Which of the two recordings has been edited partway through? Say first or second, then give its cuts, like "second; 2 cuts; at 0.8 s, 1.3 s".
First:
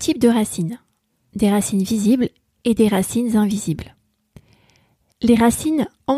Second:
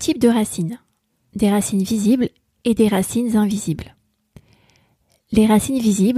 first; 1 cut; at 5.1 s